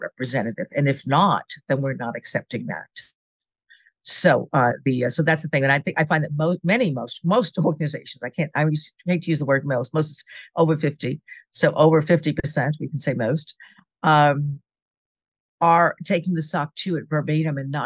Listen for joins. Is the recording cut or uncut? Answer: uncut